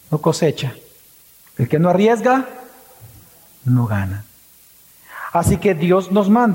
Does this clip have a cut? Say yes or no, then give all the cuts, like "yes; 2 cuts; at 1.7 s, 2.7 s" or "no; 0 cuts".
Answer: no; 0 cuts